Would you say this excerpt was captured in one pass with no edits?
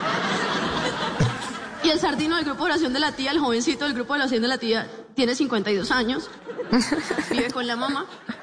yes; 0 cuts

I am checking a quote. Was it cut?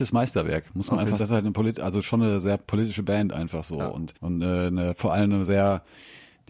yes; 2 cuts; at 1.2 s, 4.2 s

